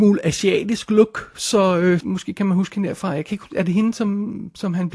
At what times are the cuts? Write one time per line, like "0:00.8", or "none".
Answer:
0:02.0